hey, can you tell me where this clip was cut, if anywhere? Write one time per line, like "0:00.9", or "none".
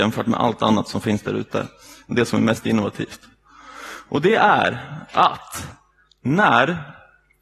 none